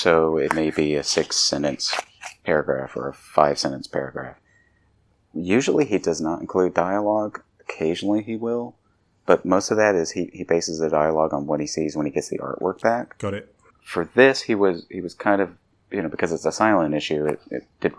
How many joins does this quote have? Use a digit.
0